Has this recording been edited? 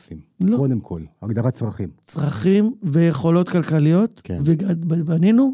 no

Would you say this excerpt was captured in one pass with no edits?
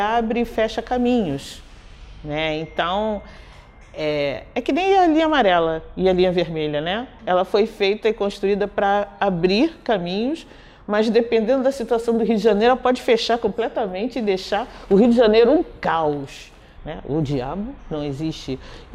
no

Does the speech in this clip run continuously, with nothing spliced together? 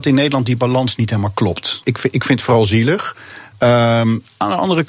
no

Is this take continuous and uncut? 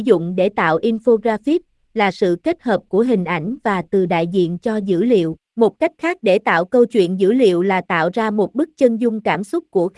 no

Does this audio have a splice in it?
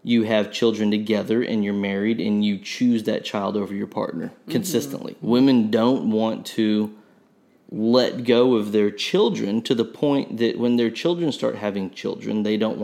yes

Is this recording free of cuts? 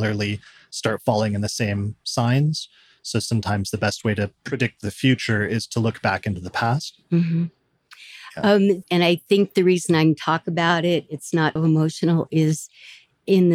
no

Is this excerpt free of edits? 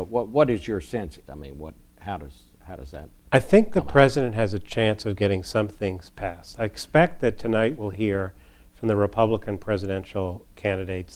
no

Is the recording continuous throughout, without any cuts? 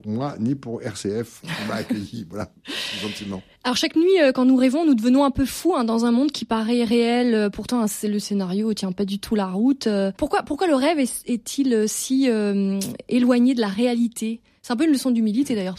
no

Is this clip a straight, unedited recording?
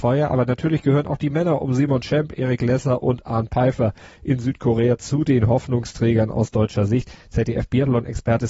yes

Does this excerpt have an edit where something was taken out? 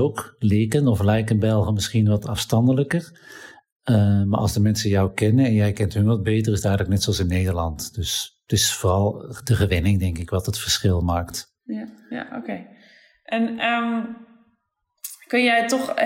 no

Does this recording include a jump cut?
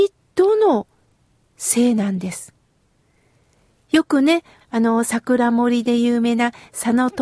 yes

